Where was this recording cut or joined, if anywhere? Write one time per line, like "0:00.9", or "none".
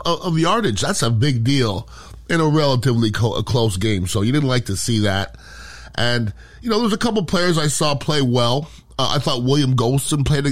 none